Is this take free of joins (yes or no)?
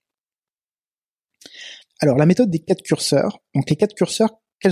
no